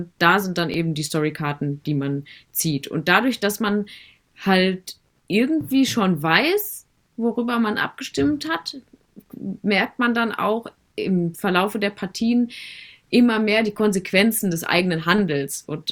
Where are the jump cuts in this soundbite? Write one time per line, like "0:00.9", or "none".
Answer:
none